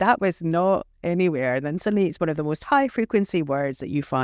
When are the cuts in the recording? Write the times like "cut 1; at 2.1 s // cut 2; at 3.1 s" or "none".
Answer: none